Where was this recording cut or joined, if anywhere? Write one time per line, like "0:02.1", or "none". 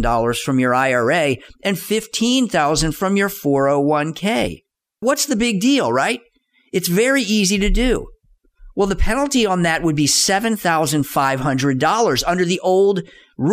none

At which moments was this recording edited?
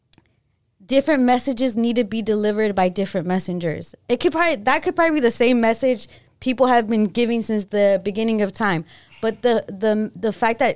none

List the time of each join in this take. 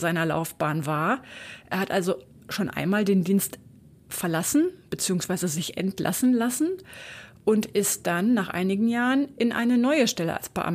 none

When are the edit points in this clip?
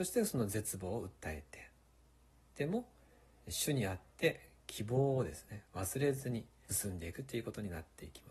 0:06.7

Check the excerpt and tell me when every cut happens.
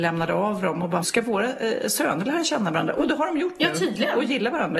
0:01.0

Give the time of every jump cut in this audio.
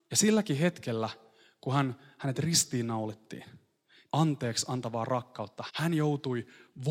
0:04.1
0:05.7

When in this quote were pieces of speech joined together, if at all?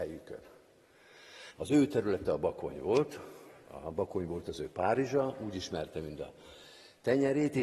0:01.6

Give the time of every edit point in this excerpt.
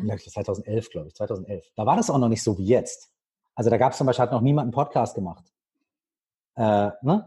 none

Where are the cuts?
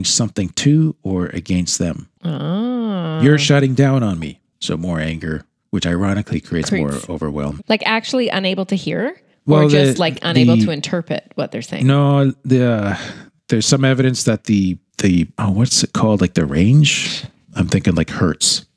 0:07.6

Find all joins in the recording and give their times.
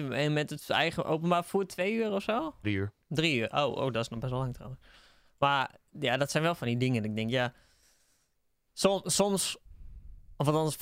0:02.6

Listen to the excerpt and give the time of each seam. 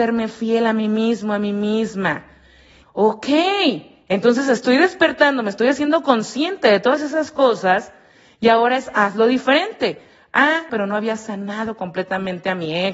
0:02.8
0:10.7

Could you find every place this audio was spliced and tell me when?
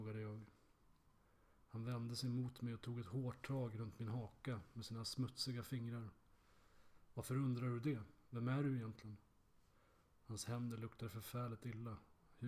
none

